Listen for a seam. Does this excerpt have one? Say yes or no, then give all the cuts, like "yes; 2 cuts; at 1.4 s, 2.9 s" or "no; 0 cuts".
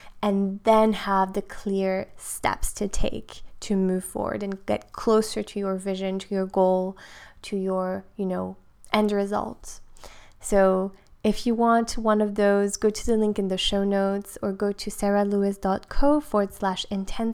no; 0 cuts